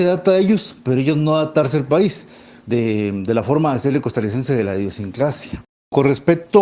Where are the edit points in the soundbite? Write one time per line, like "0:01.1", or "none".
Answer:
0:02.6